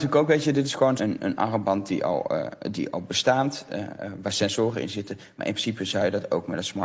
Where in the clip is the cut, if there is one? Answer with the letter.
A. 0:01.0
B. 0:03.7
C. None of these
A